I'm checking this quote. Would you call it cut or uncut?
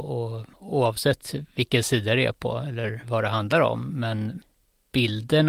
uncut